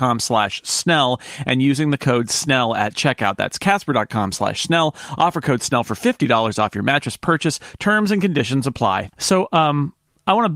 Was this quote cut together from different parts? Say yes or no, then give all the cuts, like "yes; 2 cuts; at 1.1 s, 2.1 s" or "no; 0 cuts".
yes; 1 cut; at 9.1 s